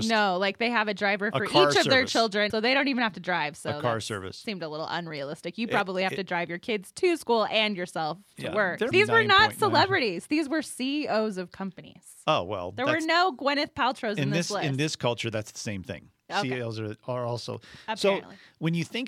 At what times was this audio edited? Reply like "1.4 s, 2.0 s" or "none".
2.5 s, 8.9 s